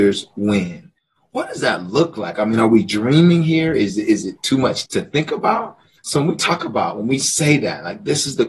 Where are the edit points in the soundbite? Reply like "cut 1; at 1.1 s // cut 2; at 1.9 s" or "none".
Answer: cut 1; at 4.9 s